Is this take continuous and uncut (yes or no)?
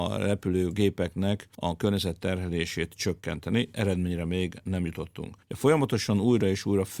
yes